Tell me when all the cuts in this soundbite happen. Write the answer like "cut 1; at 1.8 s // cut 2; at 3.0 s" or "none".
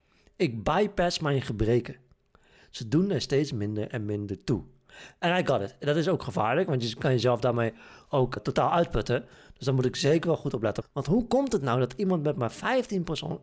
cut 1; at 8.4 s // cut 2; at 10.8 s

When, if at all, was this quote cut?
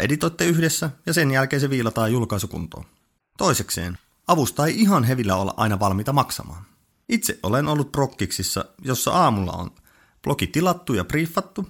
cut 1; at 3.2 s // cut 2; at 6.9 s

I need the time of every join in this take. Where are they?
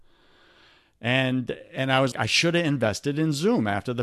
cut 1; at 2.1 s

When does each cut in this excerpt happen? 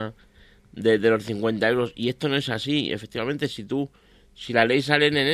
none

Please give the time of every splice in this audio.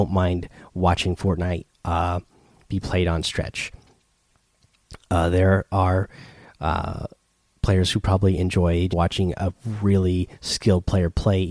cut 1; at 8.9 s

